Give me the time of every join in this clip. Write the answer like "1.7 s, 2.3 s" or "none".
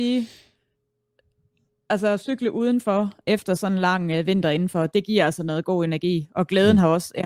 4.9 s